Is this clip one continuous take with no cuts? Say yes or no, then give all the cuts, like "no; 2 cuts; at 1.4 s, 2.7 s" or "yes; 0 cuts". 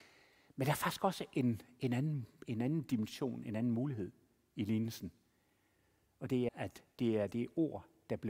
no; 1 cut; at 6.5 s